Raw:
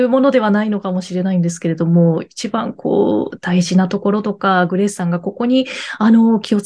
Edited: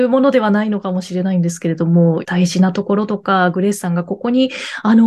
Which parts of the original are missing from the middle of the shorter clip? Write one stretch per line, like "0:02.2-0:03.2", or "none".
0:02.2-0:03.4